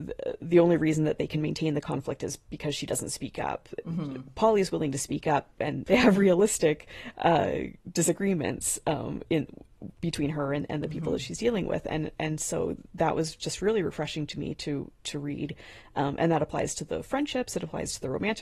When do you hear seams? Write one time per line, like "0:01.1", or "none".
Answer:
none

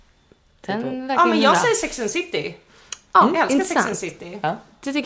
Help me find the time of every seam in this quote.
none

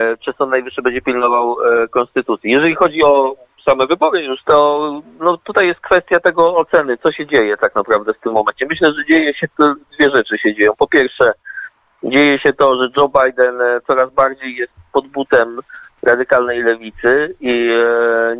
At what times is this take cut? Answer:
0:04.4

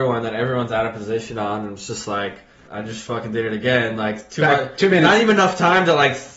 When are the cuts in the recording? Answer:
0:02.7

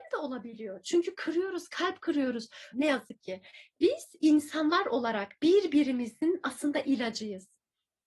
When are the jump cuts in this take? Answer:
0:02.7
0:05.4

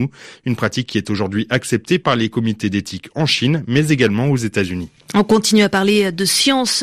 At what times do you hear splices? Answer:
none

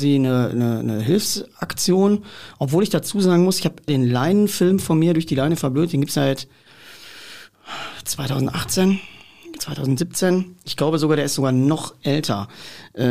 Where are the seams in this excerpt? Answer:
0:03.9

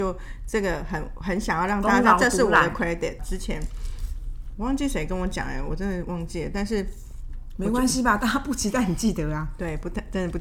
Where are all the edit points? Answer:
0:03.2

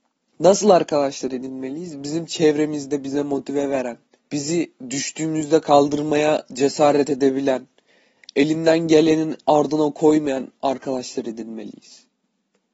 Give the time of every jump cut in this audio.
0:04.3

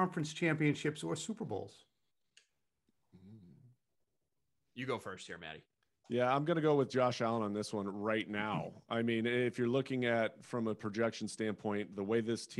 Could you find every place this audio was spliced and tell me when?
none

